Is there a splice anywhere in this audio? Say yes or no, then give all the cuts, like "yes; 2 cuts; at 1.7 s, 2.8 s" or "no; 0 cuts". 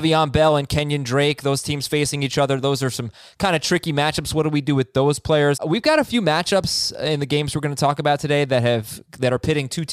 yes; 1 cut; at 5.6 s